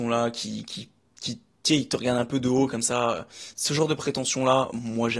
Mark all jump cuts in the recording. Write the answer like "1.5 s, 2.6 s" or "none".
none